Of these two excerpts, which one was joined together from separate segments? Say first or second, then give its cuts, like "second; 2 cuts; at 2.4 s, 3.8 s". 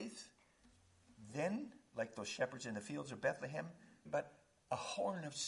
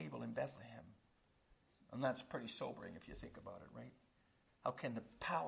first; 1 cut; at 4.1 s